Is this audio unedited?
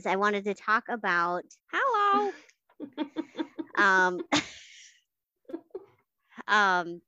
no; 1 cut; at 1.6 s

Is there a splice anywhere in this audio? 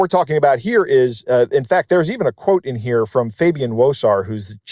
no; 0 cuts

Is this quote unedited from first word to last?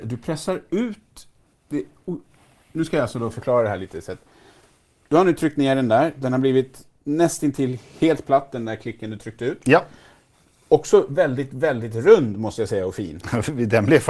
yes; 0 cuts

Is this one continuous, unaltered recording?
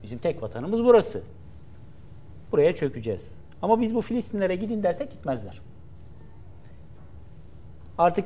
yes; 0 cuts

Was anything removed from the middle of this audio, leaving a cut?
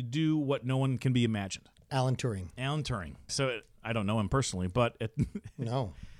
yes; 1 cut; at 3.3 s

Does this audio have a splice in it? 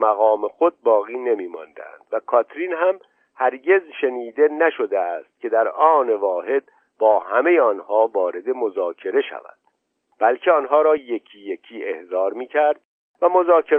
no; 0 cuts

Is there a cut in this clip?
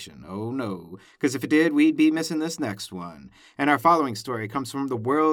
no; 0 cuts

